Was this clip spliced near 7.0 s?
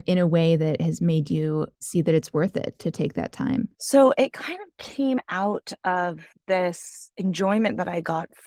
no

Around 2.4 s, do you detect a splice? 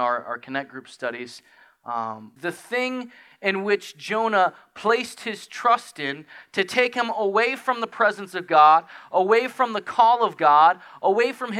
yes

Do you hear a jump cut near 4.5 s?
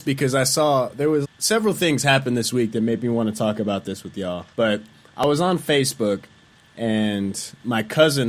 yes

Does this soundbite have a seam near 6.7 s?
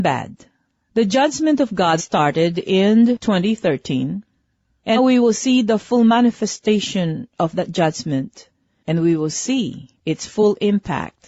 no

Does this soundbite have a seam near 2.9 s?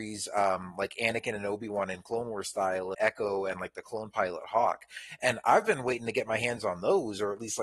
yes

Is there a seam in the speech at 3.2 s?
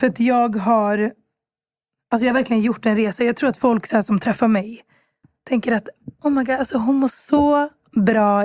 no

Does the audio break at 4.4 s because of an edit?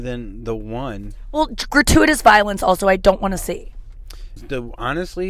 yes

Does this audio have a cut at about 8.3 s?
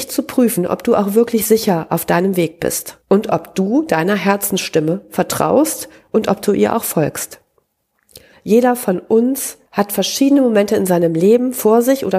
yes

